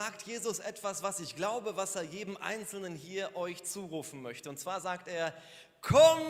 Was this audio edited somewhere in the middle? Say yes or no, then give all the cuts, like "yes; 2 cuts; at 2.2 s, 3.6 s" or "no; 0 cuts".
no; 0 cuts